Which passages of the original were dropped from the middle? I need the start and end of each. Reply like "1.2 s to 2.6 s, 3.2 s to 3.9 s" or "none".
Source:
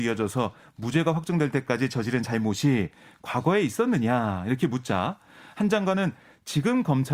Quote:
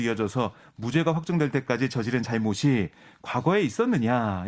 none